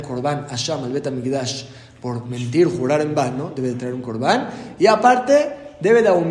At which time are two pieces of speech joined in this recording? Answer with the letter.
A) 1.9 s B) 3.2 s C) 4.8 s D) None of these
D